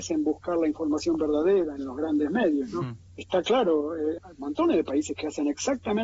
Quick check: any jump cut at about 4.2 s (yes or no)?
yes